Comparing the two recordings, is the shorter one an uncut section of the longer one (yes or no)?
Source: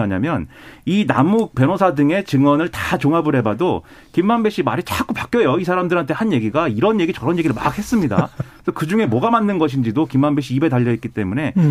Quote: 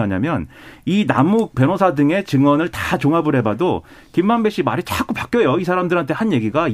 yes